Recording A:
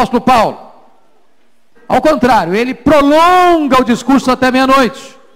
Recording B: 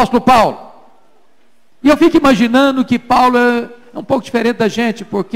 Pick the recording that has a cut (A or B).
A